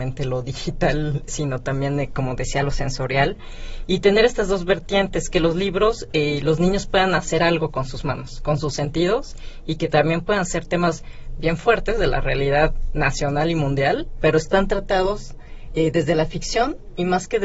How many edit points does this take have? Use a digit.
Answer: 0